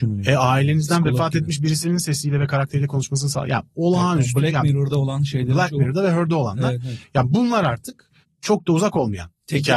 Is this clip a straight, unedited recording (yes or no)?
yes